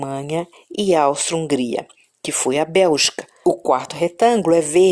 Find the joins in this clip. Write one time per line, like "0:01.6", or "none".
0:03.4